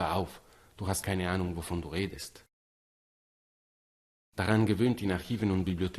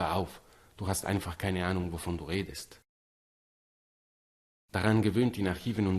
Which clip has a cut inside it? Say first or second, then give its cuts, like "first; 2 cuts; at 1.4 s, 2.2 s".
first; 1 cut; at 1.0 s